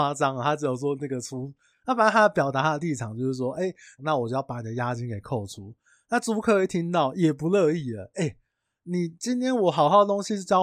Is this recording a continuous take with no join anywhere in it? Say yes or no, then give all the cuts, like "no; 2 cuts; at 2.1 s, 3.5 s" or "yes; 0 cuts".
no; 2 cuts; at 1.7 s, 4.0 s